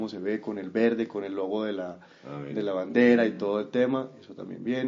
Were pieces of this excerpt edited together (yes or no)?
no